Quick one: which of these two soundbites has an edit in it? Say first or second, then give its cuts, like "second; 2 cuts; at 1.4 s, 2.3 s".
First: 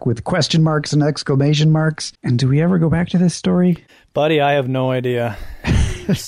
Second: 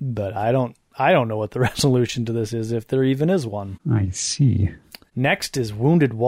first; 1 cut; at 2.1 s